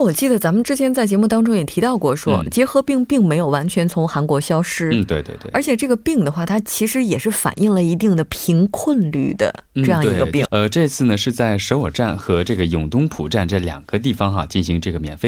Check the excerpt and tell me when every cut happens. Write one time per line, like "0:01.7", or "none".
0:10.5